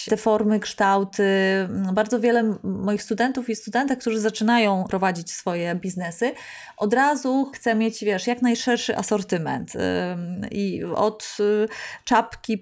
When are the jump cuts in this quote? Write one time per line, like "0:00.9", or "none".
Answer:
none